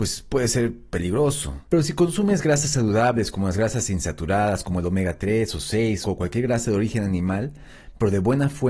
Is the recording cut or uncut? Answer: cut